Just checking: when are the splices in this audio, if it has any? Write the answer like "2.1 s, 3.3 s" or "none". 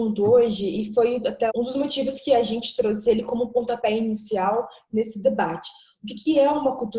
1.5 s